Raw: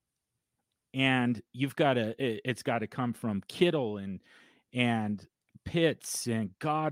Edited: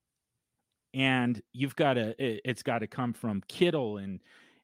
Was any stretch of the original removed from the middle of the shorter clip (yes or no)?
no